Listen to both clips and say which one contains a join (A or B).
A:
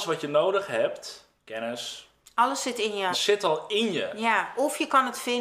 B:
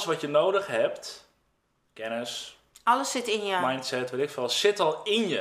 A